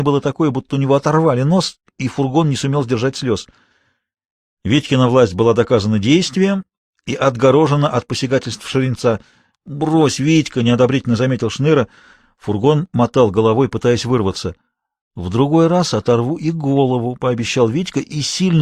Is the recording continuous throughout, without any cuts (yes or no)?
no